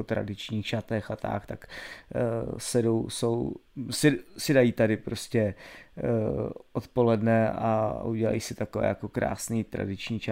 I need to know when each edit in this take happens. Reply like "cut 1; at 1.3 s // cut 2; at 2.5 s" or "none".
none